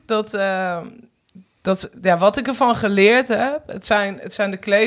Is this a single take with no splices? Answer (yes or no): yes